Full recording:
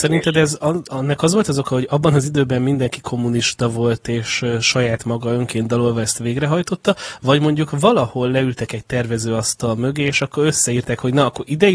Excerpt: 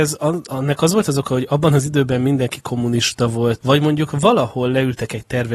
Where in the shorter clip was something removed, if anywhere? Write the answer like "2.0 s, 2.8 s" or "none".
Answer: 3.6 s